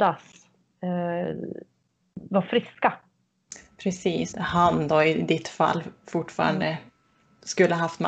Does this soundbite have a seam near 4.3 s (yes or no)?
yes